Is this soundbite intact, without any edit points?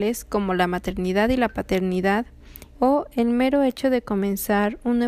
no; 1 cut; at 2.7 s

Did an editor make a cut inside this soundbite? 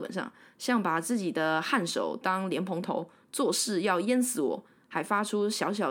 no; 0 cuts

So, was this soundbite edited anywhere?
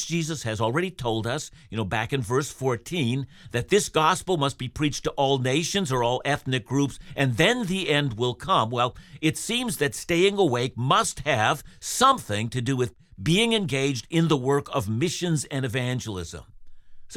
no; 0 cuts

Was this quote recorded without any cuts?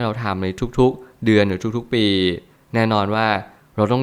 yes; 0 cuts

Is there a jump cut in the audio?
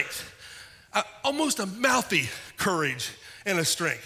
no; 0 cuts

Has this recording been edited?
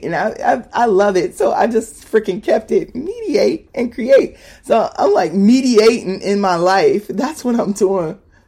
no; 0 cuts

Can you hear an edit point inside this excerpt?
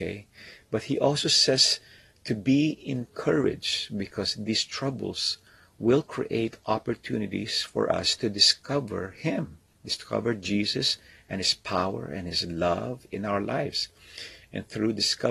no; 0 cuts

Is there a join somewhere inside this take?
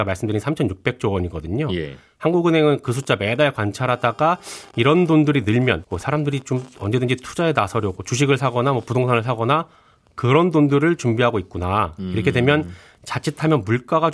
yes; 1 cut; at 5.8 s

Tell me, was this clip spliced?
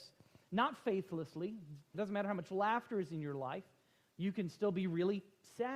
yes; 1 cut; at 1.9 s

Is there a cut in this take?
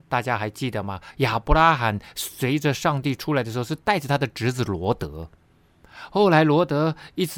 no; 0 cuts

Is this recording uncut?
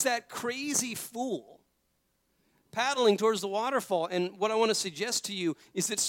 yes; 0 cuts

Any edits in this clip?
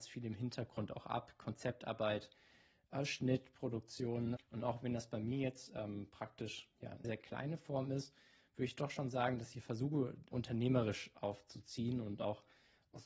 yes; 3 cuts; at 4.4 s, 7.0 s, 10.3 s

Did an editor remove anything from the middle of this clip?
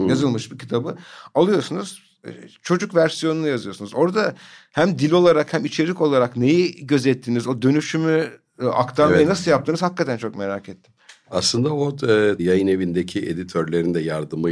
yes; 1 cut; at 12.4 s

